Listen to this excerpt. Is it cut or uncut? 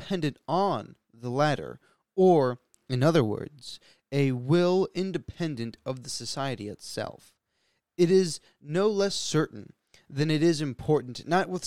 uncut